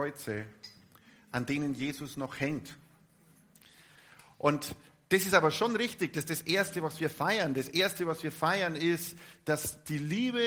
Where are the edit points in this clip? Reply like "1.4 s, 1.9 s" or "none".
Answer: none